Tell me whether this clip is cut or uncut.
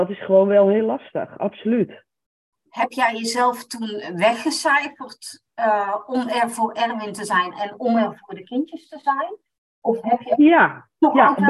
uncut